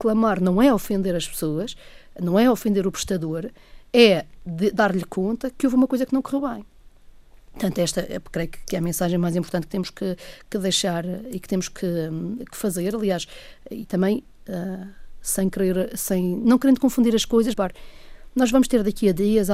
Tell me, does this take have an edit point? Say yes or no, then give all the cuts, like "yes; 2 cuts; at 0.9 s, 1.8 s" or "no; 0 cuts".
yes; 2 cuts; at 16.4 s, 17.5 s